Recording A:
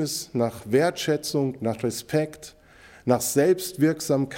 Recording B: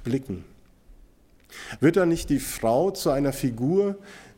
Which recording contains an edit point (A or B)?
B